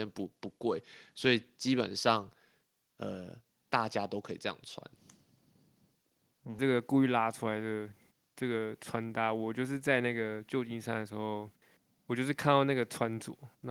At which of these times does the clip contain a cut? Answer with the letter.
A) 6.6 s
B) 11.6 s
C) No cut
A